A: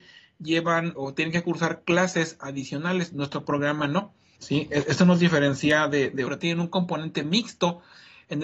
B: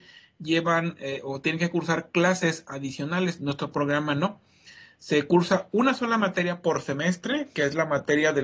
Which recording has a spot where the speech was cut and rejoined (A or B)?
A